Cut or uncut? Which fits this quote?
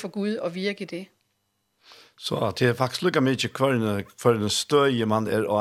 uncut